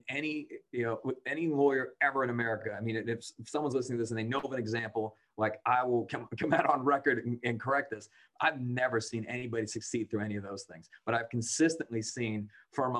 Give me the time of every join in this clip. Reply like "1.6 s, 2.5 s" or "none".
none